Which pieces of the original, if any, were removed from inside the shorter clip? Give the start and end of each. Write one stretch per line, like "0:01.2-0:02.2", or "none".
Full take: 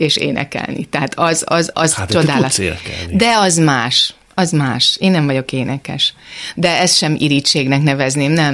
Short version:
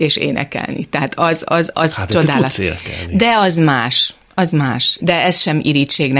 0:05.0-0:06.5